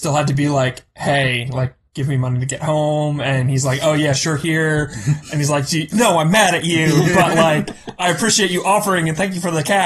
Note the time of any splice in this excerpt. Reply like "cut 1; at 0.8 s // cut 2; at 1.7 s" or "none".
cut 1; at 5.9 s

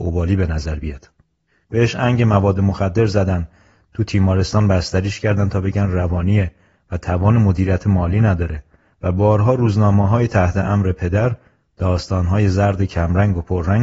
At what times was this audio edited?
cut 1; at 1.6 s

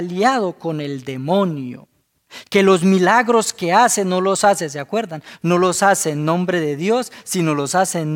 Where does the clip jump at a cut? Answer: none

